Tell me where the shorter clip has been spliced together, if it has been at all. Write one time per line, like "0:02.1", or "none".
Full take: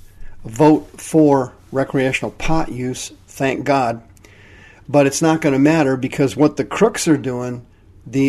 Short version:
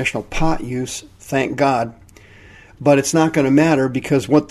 none